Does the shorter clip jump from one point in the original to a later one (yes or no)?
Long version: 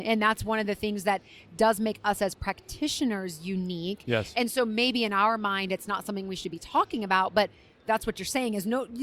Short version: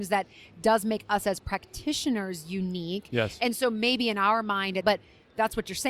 yes